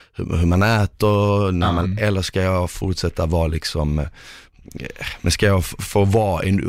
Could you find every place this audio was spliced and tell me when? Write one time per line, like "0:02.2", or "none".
0:01.8